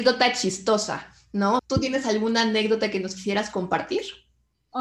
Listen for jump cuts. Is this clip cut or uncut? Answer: cut